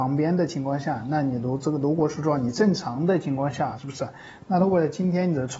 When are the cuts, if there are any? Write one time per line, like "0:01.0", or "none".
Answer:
0:03.8